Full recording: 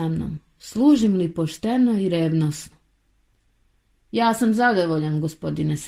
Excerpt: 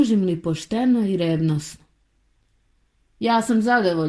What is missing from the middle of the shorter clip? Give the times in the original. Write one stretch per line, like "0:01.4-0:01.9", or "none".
none